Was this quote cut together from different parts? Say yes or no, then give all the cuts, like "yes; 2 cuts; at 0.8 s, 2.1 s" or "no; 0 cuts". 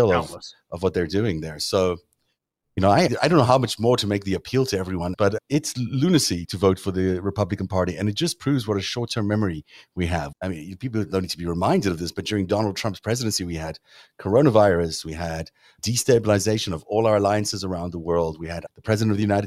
no; 0 cuts